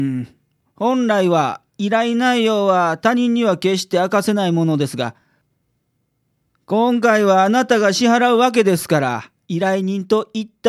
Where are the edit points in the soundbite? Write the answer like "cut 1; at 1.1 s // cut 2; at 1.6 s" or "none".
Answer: none